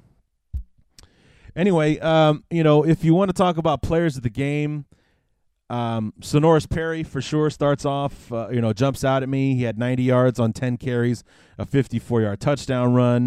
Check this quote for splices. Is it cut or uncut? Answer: uncut